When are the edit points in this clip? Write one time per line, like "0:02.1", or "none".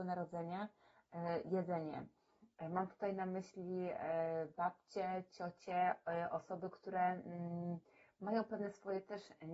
none